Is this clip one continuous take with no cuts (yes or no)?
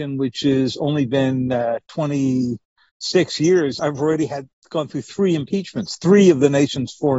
yes